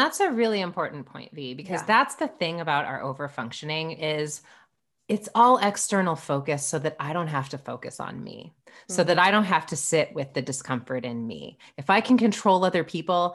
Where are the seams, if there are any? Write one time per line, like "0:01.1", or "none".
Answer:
none